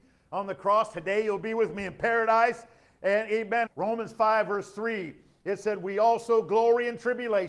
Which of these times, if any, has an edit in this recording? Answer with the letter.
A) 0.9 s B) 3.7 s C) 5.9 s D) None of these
B